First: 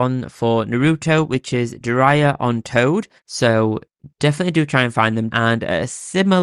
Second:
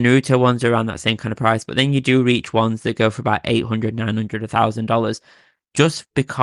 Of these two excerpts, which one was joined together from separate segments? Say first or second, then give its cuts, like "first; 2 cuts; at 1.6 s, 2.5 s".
first; 2 cuts; at 3.2 s, 5.3 s